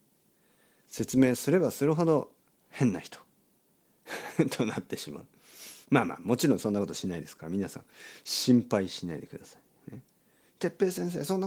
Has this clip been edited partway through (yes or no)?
no